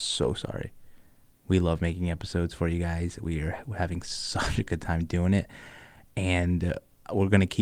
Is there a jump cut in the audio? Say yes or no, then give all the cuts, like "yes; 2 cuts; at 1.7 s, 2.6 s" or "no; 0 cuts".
no; 0 cuts